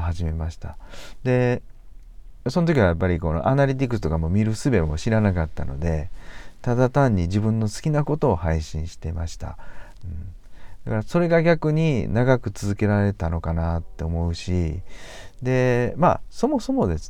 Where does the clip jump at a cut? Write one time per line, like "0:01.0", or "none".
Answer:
0:10.0

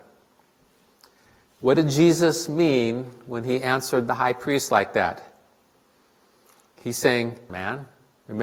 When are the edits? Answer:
0:07.5

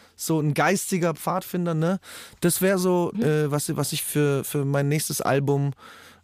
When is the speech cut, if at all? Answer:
0:03.1

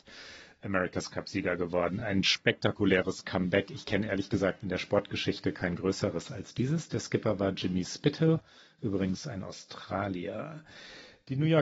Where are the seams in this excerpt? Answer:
none

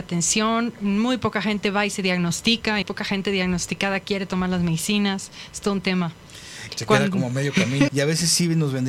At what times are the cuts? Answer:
0:02.8
0:06.7
0:07.9

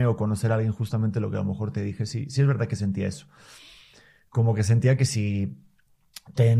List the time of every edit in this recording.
none

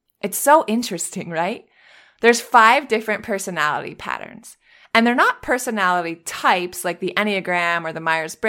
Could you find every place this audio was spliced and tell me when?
none

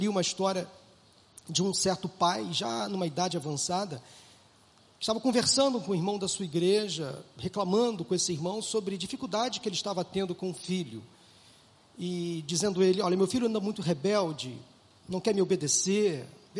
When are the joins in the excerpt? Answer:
none

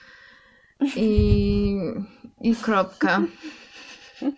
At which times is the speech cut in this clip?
0:02.4

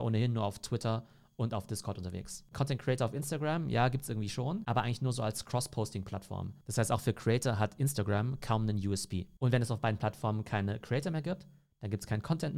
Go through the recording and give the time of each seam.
0:02.5

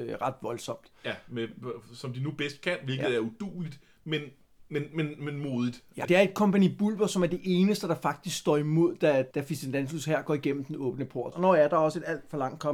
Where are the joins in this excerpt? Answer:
0:06.0
0:09.3
0:11.3

